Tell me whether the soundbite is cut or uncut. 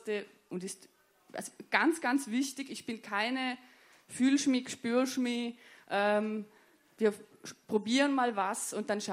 uncut